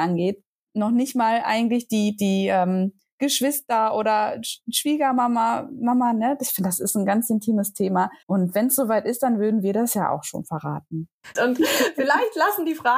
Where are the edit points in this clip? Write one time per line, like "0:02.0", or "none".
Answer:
0:08.2
0:11.4